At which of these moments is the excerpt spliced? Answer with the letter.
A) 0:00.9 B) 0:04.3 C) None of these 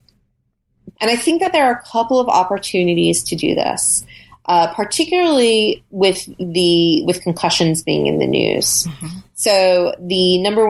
A